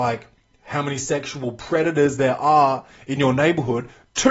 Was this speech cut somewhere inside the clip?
no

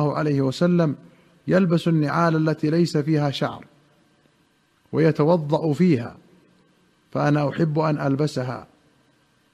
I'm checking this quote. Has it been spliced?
no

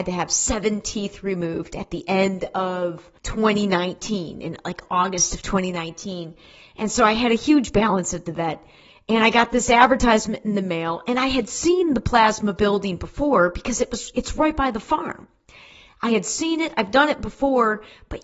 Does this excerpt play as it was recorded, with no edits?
no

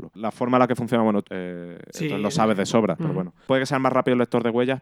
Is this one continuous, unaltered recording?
no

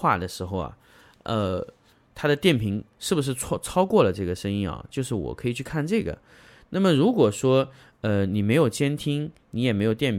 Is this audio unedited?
yes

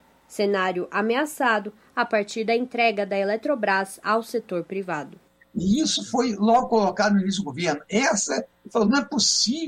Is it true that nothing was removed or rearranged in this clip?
yes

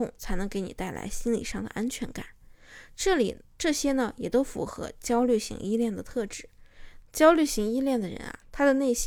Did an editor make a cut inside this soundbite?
yes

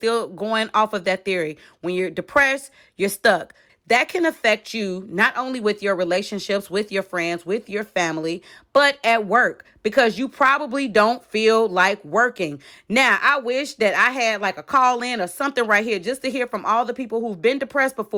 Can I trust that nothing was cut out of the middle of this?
no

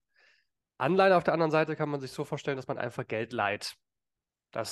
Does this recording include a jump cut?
no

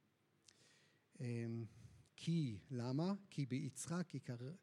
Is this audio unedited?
yes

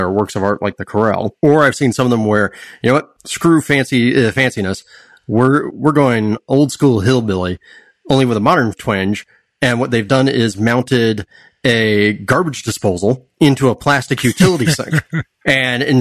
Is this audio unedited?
yes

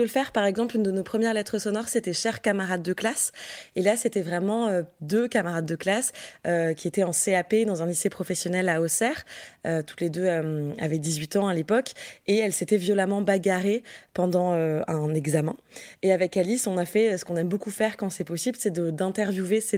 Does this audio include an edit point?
no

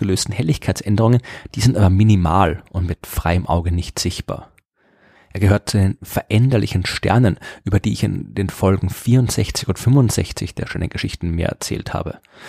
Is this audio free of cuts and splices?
no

